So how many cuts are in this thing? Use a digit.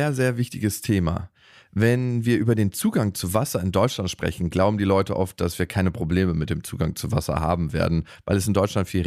0